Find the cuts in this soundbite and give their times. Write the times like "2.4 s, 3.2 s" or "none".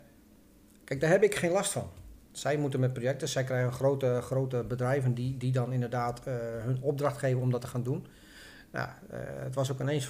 none

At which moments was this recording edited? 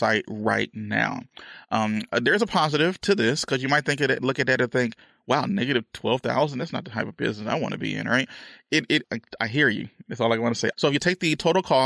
9.0 s, 10.7 s

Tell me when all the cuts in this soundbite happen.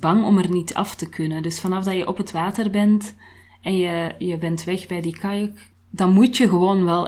5.7 s

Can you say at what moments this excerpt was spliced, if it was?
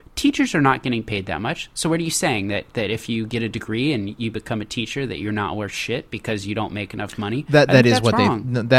none

